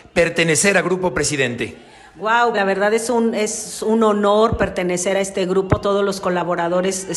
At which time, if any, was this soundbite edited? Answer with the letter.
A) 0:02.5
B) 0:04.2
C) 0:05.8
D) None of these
A